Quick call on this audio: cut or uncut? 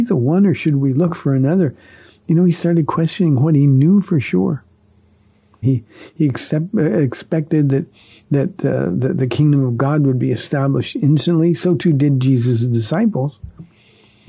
cut